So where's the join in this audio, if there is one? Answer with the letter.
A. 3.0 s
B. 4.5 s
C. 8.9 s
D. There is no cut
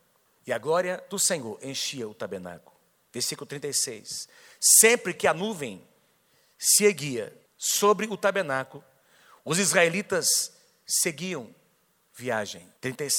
D